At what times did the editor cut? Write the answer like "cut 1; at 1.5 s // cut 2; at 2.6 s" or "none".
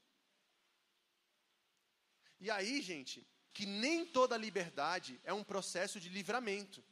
cut 1; at 3.5 s